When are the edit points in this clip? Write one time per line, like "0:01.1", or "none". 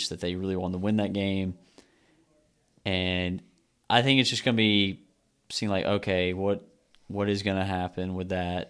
none

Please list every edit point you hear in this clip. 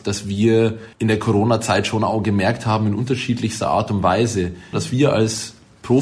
0:00.9
0:04.7

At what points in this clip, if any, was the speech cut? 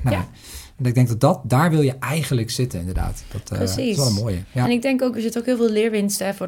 none

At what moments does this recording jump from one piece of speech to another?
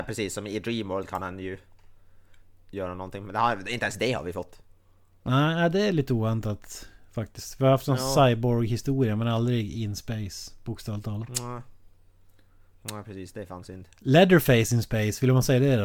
none

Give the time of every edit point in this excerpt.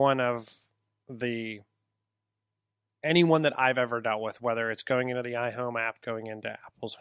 0:06.0

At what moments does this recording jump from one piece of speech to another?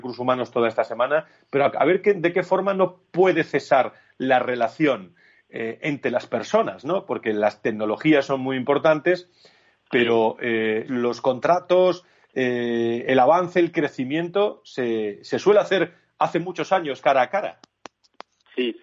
0:10.9

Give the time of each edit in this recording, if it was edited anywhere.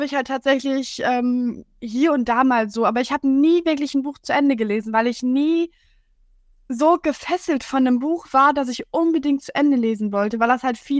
none

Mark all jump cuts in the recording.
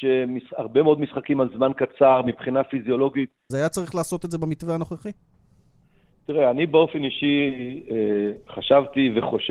0:03.5

